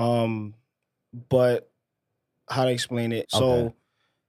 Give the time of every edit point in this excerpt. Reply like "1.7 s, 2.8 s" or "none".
3.2 s

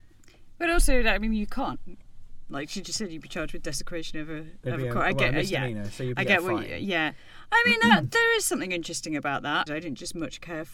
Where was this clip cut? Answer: 9.7 s

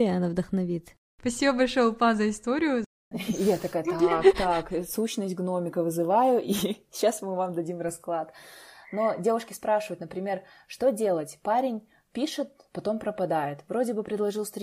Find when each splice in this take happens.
3.1 s

